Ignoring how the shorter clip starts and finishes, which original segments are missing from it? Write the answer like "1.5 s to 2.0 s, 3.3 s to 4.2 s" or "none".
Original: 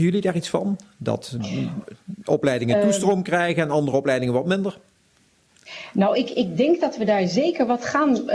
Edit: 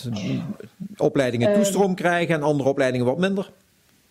none